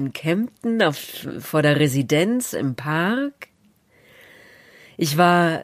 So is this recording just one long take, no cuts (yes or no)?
yes